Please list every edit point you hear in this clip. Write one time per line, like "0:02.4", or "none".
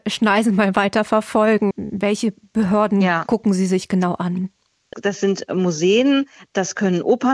0:01.7